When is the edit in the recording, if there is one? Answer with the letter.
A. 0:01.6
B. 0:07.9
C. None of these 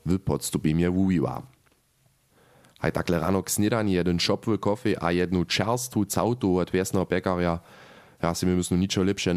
C